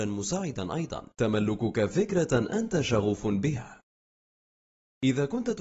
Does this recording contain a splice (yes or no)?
yes